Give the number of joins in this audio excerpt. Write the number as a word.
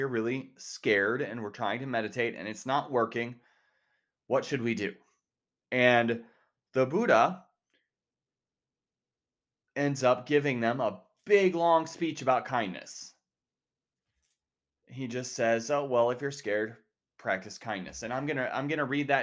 one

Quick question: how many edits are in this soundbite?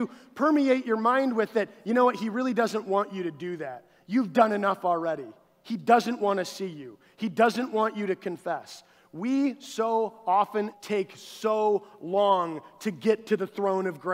one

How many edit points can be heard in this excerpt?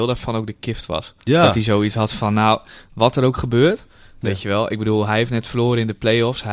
two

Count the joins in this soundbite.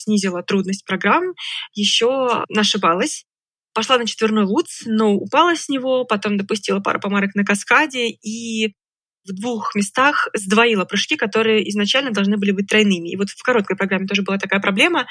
one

